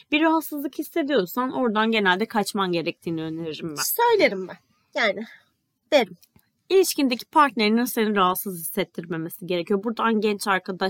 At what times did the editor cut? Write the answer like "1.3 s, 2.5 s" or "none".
none